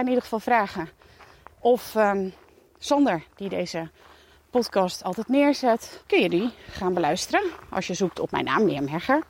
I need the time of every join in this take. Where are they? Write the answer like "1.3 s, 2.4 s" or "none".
6.0 s